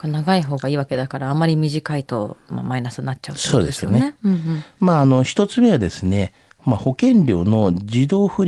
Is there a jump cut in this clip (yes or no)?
no